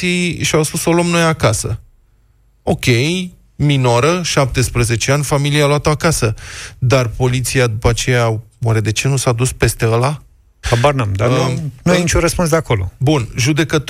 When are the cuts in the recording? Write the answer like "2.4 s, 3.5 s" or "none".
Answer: 10.6 s